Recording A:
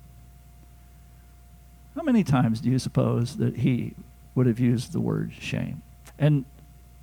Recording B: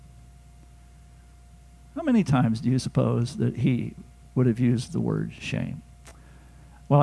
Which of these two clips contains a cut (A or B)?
A